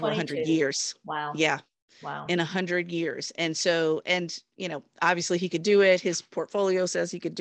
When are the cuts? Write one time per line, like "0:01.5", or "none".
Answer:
none